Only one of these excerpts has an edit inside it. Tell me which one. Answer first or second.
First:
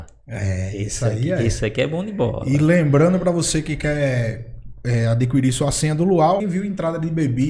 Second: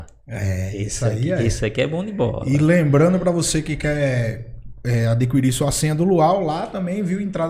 first